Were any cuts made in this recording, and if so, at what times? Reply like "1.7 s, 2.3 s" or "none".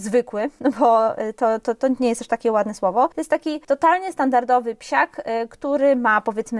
none